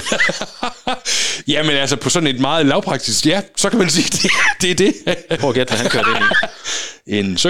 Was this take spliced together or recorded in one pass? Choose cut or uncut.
cut